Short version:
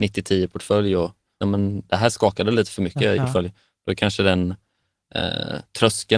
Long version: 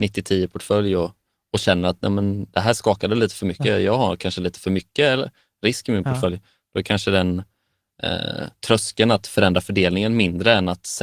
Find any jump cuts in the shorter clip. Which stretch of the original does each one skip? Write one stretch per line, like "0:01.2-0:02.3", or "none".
0:01.4-0:02.0
0:03.8-0:06.0